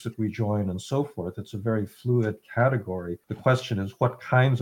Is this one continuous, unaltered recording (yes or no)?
no